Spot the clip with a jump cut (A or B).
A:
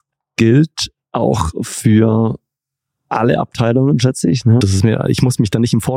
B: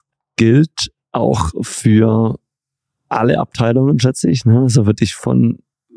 A